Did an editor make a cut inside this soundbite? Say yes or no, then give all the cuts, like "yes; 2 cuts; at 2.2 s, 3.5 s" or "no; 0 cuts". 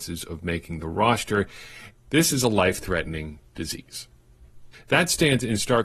yes; 2 cuts; at 2.0 s, 4.7 s